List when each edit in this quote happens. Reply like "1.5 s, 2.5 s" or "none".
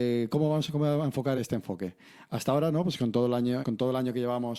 1.4 s, 3.6 s